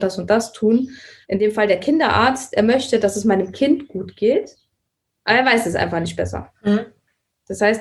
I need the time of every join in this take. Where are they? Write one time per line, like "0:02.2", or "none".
0:01.2